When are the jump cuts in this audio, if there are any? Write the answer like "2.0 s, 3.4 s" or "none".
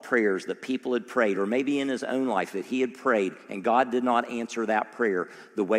none

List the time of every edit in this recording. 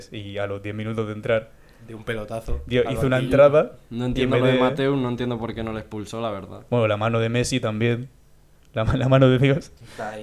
none

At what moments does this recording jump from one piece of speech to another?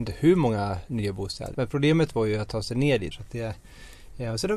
1.5 s, 3.1 s

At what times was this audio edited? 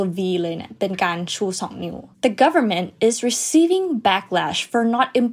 2.1 s

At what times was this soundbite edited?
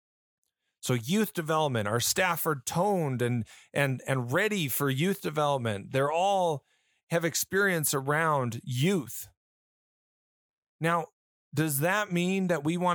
none

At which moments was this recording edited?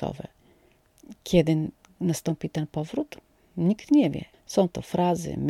4.3 s

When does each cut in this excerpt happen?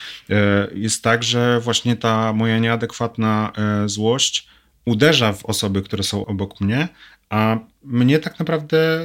6.2 s

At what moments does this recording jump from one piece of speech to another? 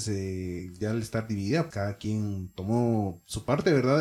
1.7 s

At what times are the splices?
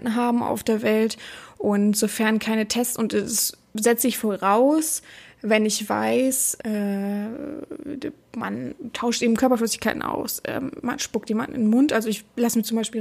6.6 s

